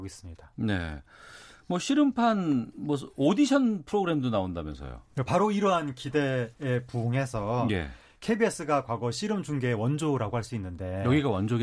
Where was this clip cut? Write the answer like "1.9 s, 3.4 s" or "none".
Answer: none